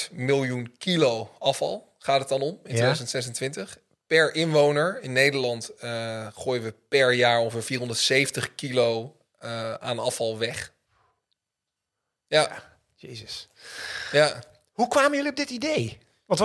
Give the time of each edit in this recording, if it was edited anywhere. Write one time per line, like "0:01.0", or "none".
none